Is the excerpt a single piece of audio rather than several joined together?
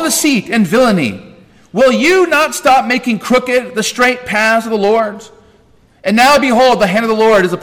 yes; 0 cuts

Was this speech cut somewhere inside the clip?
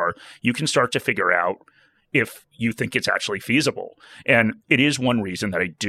no; 0 cuts

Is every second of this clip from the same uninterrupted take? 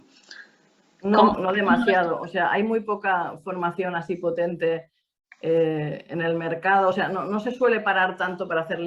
yes; 0 cuts

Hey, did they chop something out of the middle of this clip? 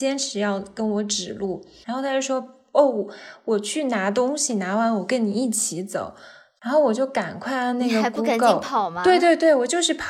yes; 1 cut; at 1.8 s

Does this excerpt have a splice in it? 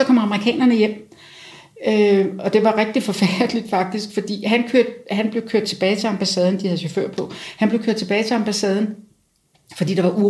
no; 0 cuts

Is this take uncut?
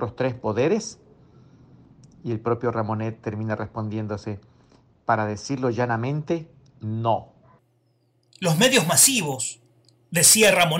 yes; 0 cuts

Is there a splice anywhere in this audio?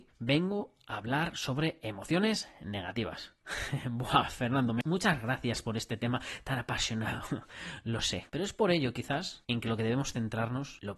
yes; 2 cuts; at 8.3 s, 9.4 s

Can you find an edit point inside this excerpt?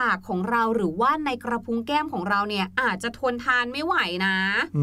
no; 0 cuts

